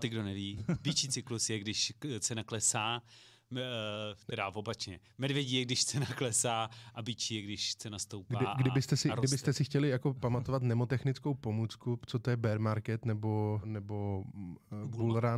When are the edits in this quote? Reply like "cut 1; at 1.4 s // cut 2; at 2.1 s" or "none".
cut 1; at 13.6 s